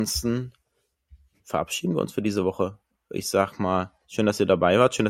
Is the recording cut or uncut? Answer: uncut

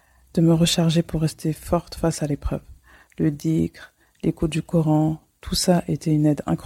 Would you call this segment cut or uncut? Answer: uncut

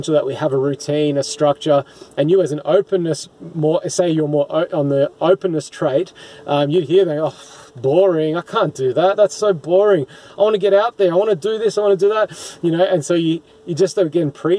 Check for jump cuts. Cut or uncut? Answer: uncut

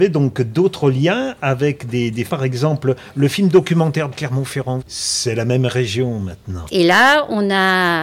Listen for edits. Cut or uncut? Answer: cut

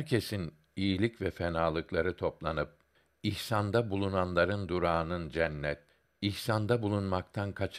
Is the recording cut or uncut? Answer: uncut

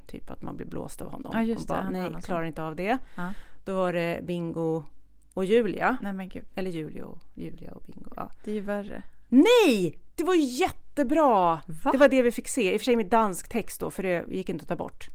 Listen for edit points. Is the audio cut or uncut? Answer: uncut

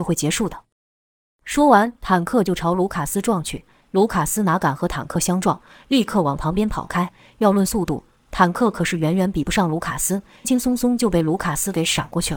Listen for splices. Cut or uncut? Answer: cut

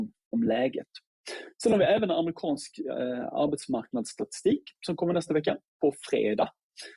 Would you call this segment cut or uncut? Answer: uncut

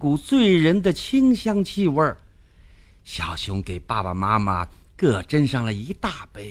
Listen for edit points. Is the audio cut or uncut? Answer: uncut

